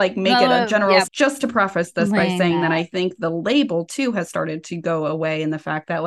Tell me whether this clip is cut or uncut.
cut